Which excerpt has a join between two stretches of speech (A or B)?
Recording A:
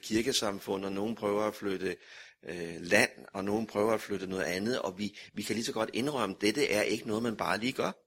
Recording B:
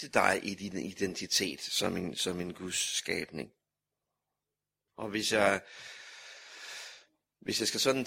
B